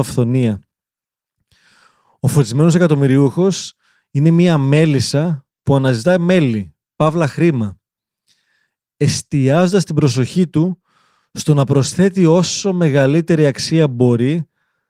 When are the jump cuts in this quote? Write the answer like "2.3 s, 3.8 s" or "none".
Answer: none